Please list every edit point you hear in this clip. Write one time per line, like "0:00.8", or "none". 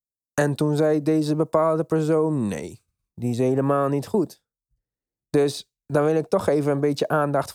none